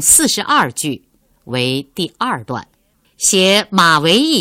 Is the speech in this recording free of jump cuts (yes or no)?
yes